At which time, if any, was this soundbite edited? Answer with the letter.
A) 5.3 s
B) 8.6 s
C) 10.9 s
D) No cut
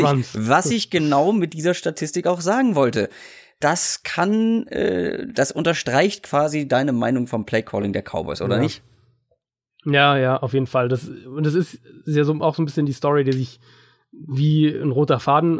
D